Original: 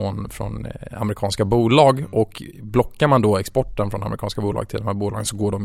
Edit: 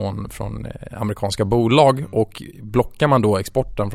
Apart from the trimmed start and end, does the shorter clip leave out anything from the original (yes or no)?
no